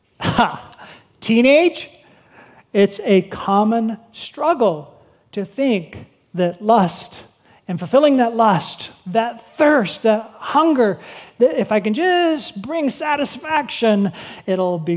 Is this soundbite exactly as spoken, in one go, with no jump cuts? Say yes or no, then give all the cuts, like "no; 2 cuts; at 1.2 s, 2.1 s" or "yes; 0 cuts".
yes; 0 cuts